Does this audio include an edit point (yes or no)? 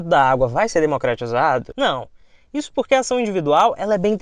no